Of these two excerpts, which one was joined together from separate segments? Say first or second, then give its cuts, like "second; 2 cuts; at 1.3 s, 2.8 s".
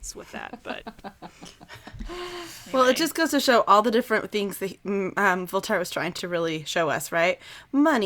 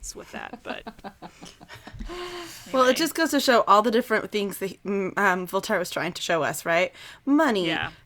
second; 1 cut; at 6.2 s